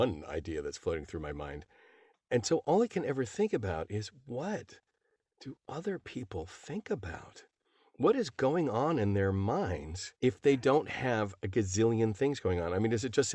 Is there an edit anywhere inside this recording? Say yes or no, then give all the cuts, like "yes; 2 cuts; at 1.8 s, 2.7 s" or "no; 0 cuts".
yes; 1 cut; at 10.2 s